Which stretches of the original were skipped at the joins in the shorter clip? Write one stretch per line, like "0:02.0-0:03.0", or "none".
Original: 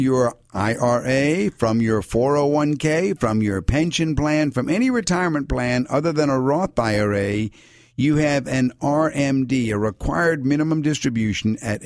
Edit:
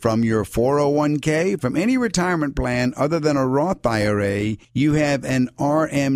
0:03.2-0:04.5
0:07.6-0:07.9